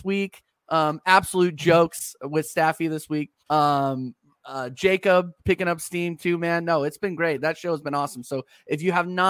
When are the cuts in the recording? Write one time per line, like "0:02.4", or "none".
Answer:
0:03.4

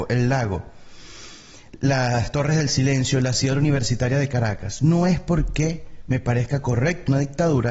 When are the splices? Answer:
none

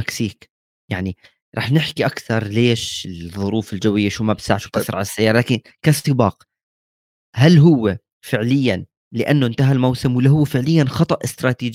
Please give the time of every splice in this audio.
none

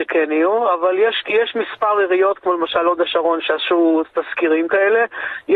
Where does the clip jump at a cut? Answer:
none

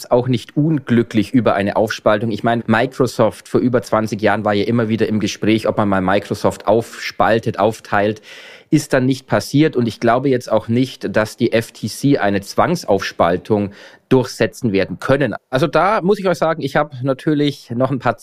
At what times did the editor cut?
0:02.6
0:15.4

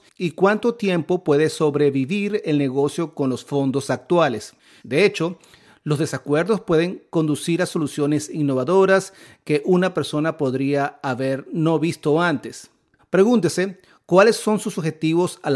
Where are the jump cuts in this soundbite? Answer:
0:04.8
0:13.0

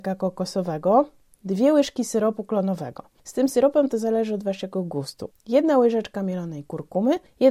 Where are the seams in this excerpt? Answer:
0:05.3

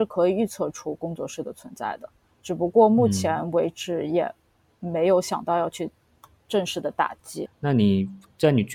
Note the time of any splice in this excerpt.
0:07.4

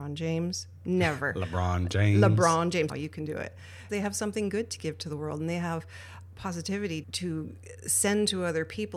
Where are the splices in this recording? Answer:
0:02.9
0:03.9
0:07.0

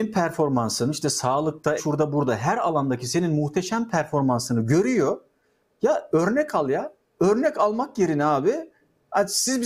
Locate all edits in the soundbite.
0:01.8

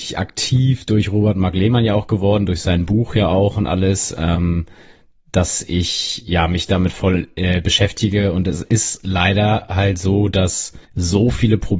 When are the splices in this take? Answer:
0:10.9

